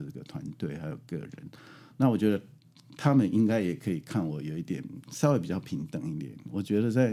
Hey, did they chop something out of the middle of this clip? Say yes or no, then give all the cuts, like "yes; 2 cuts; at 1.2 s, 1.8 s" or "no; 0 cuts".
no; 0 cuts